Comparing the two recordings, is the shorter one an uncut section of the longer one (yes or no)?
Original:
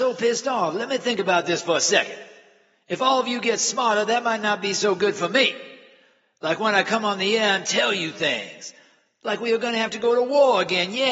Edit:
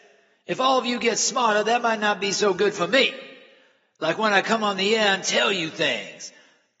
yes